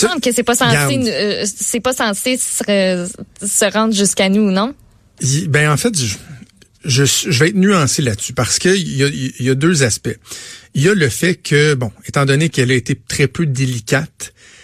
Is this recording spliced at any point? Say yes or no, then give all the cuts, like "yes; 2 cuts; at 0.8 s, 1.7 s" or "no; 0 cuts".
no; 0 cuts